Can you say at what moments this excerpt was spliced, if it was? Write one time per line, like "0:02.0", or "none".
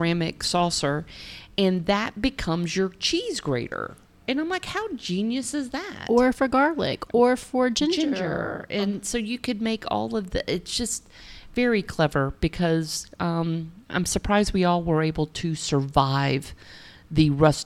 0:13.8